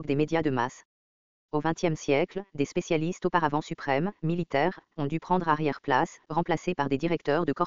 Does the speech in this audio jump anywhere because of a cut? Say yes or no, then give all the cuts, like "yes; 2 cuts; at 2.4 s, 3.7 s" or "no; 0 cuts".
yes; 2 cuts; at 1.3 s, 4.9 s